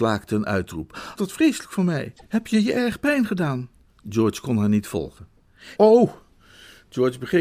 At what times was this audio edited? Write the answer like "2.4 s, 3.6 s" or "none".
1.2 s, 3.9 s, 5.8 s